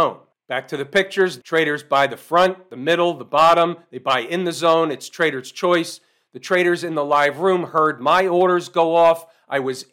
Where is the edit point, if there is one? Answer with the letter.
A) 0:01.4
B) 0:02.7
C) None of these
A